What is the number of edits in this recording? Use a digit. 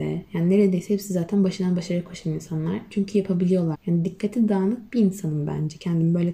1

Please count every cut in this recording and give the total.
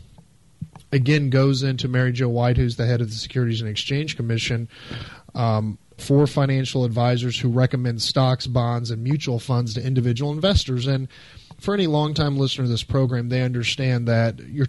1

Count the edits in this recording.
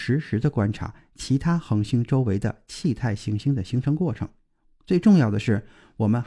1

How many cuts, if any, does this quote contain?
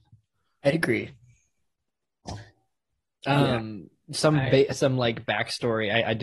0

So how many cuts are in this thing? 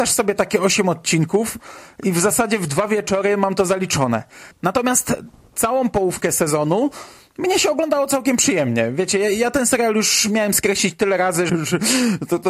2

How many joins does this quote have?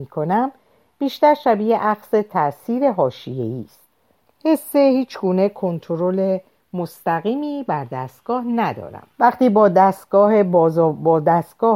2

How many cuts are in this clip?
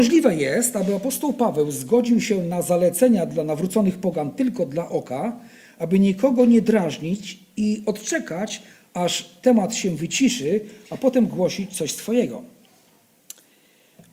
0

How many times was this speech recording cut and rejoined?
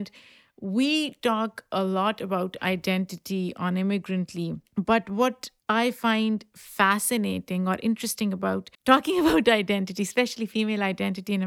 2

